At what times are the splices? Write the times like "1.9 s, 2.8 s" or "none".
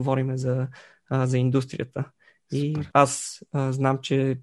2.9 s